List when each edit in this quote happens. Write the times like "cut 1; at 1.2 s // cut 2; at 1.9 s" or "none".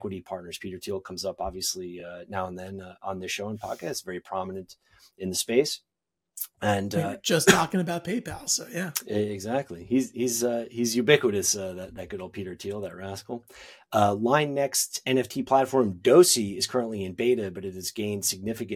none